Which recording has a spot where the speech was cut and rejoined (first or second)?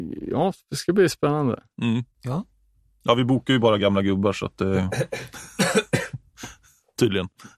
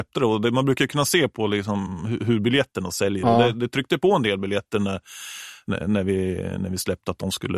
first